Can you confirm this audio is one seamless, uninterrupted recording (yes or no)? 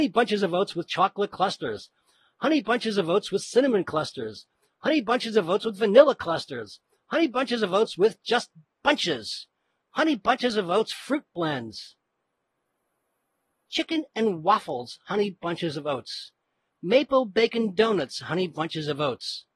yes